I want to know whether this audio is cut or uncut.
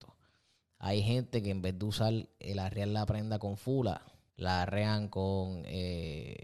cut